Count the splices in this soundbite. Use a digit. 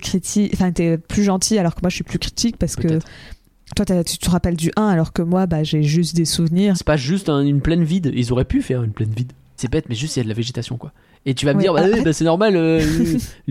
2